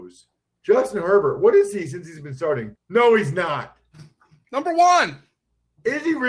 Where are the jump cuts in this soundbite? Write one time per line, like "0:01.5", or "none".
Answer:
0:02.7